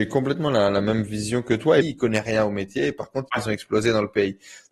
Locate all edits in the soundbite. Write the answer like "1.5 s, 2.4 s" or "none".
1.8 s, 3.3 s